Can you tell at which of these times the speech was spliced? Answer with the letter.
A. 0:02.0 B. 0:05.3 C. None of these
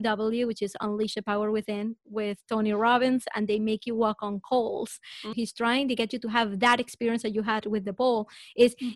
B